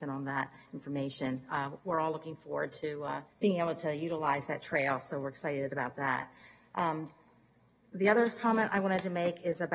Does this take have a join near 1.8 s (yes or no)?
no